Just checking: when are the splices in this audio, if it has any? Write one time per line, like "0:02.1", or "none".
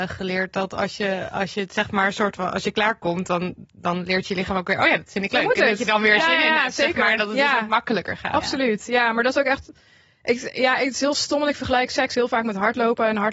none